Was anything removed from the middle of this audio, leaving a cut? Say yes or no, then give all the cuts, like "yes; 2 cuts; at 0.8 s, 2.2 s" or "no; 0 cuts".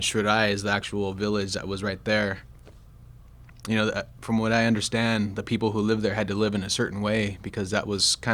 no; 0 cuts